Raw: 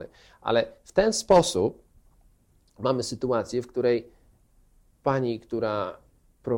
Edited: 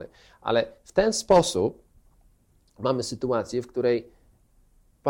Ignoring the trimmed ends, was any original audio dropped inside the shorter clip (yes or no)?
no